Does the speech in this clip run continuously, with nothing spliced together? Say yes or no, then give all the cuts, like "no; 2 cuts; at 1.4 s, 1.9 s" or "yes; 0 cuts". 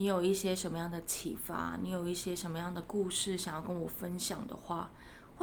yes; 0 cuts